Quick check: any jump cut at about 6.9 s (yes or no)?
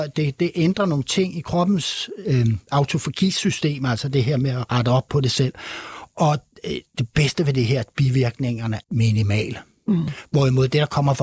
no